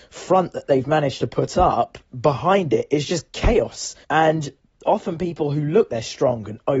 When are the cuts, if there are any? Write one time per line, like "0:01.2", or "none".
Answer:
0:04.0
0:05.9